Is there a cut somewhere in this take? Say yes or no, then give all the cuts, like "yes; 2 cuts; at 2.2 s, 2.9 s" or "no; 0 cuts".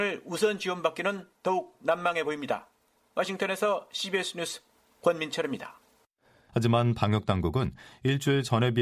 yes; 1 cut; at 6.5 s